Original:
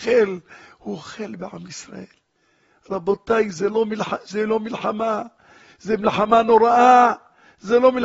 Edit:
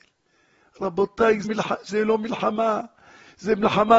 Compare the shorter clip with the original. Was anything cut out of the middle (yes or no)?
yes